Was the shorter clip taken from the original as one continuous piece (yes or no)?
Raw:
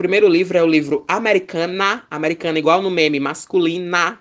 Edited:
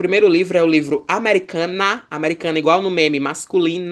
yes